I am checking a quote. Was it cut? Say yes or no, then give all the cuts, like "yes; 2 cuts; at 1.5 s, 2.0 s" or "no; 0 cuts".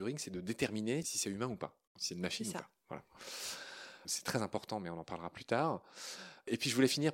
yes; 2 cuts; at 1.9 s, 4.0 s